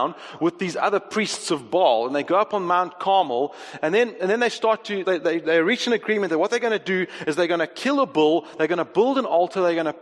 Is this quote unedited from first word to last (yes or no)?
no